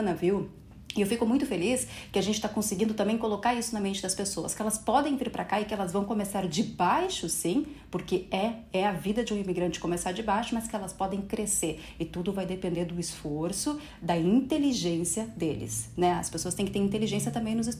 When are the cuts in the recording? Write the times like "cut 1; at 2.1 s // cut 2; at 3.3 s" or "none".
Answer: none